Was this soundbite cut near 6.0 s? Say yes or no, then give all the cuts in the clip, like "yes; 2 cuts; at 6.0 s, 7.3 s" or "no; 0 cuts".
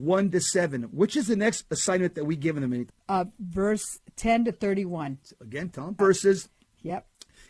yes; 2 cuts; at 2.9 s, 6.0 s